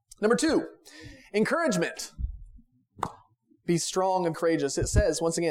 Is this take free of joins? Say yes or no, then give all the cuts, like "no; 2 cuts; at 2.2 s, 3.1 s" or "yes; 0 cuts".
no; 1 cut; at 4.3 s